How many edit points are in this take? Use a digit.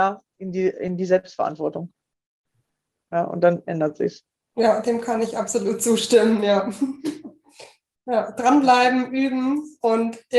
1